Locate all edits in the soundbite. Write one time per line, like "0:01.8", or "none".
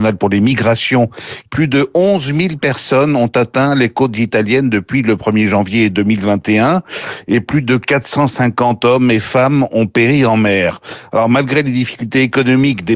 0:01.5